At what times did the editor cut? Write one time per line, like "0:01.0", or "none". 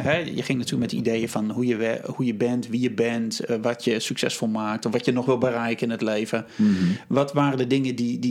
none